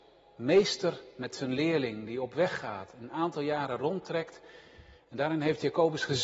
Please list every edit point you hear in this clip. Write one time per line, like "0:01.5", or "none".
none